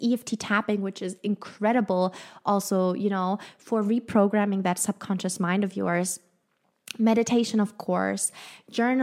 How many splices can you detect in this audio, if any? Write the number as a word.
zero